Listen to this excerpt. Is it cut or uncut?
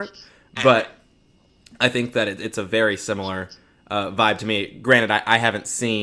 uncut